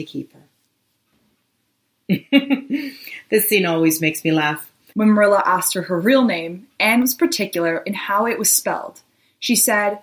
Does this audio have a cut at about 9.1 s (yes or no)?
no